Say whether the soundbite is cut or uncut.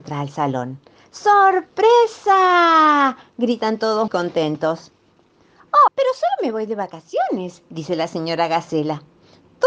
cut